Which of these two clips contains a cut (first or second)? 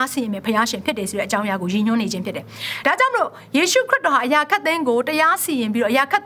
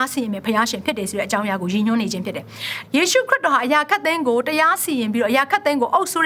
second